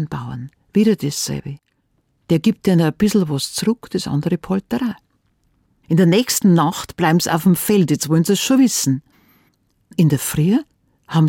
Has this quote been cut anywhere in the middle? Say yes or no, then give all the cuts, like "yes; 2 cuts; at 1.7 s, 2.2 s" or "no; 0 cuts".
no; 0 cuts